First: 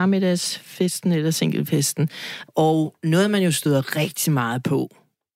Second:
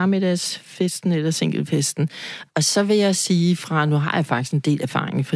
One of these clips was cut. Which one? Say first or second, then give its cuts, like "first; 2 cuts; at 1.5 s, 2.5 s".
first; 1 cut; at 2.5 s